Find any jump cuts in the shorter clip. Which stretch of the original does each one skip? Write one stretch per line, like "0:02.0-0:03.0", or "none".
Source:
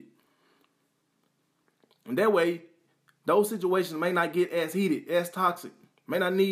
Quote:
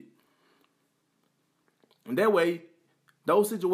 none